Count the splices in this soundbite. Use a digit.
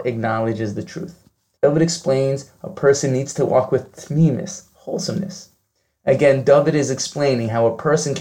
2